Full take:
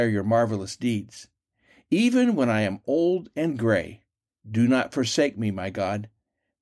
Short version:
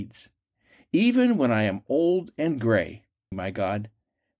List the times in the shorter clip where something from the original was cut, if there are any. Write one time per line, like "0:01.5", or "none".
0:03.3

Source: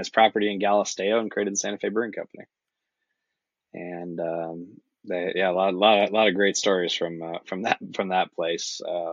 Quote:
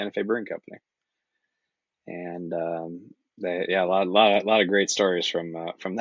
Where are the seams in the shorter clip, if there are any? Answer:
none

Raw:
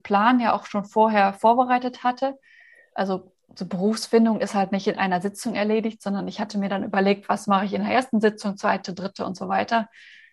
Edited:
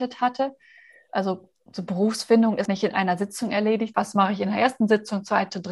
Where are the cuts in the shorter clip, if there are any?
0:02.7
0:03.9

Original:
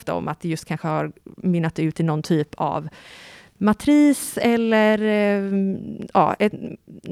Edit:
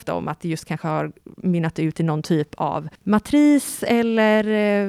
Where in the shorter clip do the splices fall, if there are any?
0:03.0

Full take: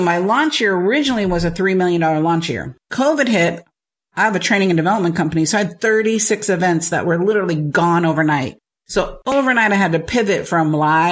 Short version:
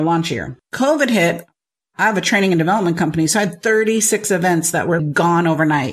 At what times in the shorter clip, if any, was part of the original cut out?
0:05.0

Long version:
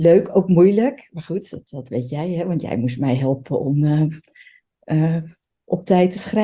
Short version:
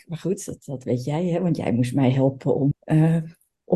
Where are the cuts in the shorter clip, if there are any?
0:02.7

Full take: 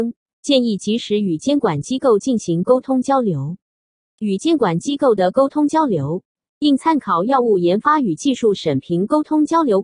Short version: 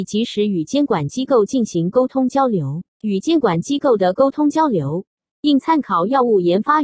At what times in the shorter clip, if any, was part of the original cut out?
0:02.9

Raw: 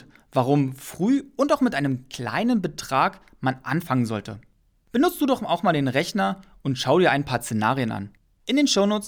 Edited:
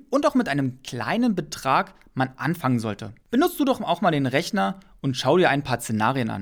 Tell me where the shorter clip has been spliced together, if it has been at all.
0:03.2

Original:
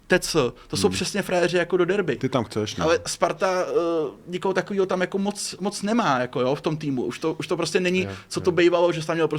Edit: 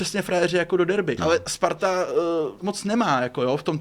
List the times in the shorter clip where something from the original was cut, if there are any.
0:01.2
0:02.6

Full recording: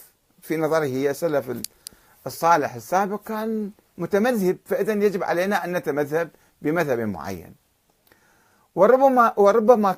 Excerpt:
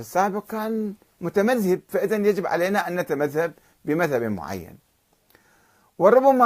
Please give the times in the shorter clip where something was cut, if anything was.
none

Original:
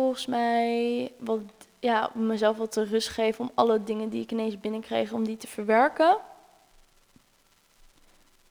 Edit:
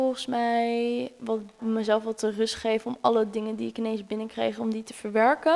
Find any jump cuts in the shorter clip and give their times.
0:01.6

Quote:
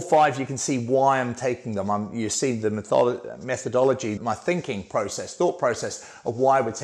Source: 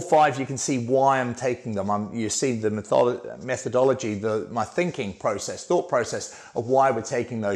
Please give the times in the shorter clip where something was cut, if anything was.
0:04.2

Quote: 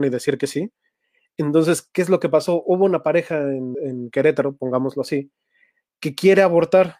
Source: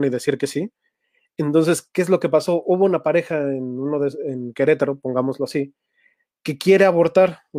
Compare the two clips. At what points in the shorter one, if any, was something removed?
0:03.7

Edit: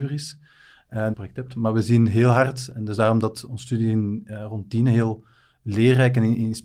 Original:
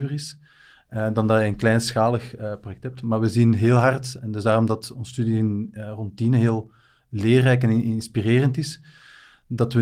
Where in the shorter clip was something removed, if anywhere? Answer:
0:01.1

